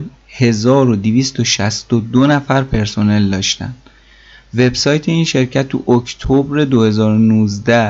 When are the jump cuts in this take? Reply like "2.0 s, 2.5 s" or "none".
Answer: none

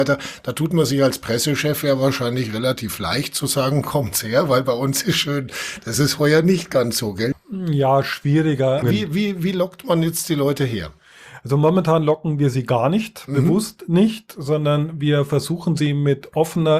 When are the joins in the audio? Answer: 7.3 s, 8.8 s

